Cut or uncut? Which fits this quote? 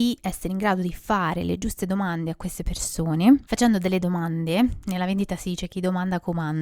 cut